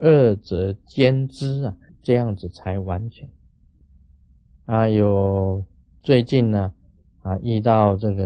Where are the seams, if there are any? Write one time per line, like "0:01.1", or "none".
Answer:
0:01.9